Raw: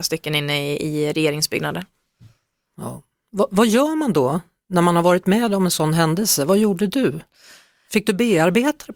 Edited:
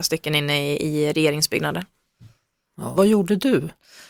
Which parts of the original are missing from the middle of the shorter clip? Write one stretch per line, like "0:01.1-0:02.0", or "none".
0:02.9-0:06.5